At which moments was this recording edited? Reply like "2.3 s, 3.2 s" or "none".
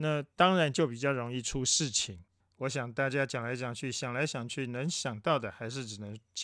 2.4 s